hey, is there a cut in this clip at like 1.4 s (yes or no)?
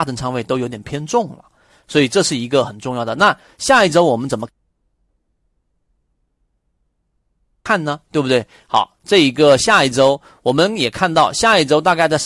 no